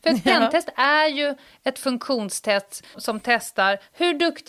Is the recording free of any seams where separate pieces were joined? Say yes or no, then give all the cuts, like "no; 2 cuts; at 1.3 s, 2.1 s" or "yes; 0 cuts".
no; 1 cut; at 2.9 s